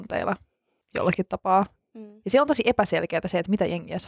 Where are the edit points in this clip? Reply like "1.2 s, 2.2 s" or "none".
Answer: none